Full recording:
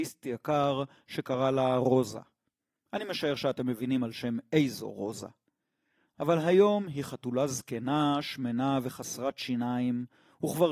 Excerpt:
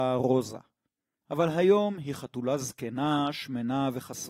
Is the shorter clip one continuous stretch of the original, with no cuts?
no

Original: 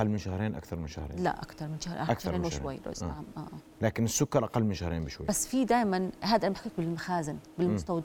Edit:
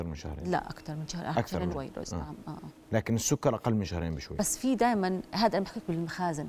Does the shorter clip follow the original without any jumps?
no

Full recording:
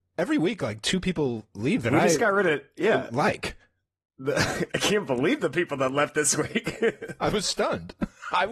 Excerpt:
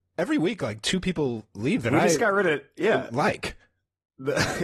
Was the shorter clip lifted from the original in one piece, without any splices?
yes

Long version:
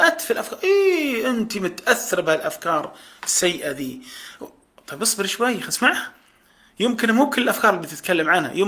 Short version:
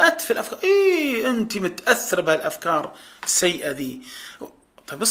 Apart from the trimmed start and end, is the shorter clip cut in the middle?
no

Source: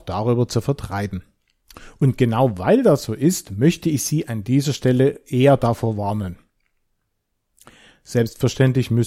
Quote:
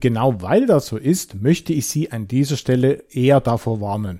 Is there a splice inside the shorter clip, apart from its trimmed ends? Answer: no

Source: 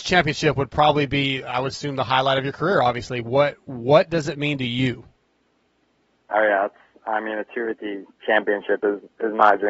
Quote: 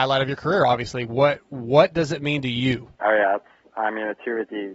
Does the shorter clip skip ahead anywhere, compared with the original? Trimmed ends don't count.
yes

